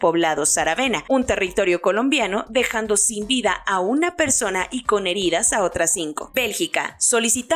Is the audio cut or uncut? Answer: cut